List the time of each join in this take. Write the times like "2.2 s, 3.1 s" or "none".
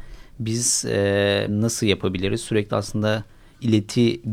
1.5 s